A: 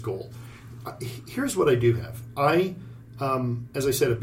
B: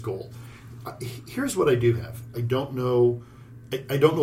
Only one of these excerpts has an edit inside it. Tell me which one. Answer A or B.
B